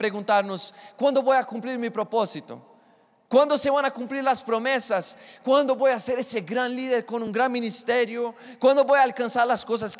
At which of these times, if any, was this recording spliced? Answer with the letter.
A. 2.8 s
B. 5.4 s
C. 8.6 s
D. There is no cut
D